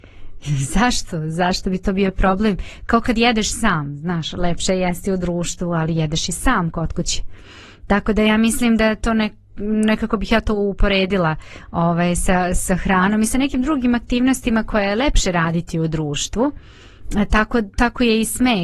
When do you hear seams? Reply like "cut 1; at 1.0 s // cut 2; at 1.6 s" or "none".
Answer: none